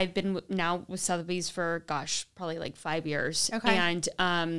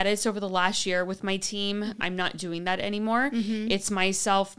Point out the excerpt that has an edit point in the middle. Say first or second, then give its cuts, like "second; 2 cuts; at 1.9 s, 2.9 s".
second; 1 cut; at 2.0 s